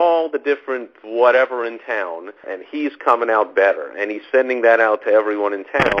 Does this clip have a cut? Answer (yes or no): yes